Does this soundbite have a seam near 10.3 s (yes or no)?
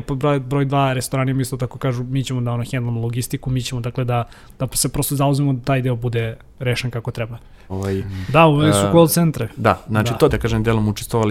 yes